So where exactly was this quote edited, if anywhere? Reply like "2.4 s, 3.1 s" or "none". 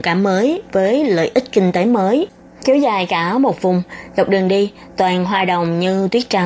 2.6 s